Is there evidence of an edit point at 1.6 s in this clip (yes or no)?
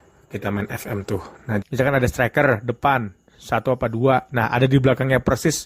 yes